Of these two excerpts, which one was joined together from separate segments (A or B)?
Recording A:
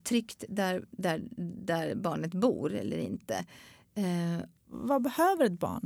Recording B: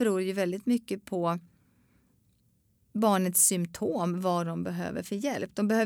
A